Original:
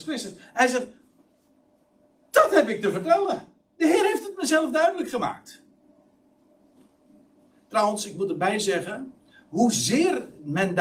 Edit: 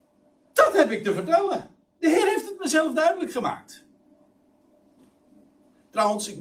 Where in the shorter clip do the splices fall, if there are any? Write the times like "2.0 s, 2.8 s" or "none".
none